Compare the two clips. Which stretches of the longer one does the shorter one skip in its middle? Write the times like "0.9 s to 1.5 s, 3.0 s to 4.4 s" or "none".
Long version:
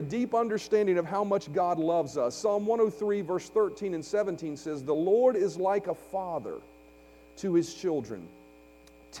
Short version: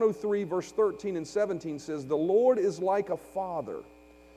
none